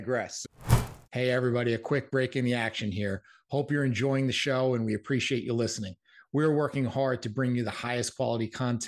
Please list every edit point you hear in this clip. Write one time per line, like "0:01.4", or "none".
0:01.0